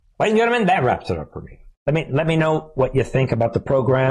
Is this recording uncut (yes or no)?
yes